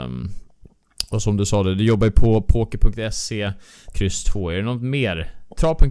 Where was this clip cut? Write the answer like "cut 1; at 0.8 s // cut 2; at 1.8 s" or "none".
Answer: cut 1; at 3.9 s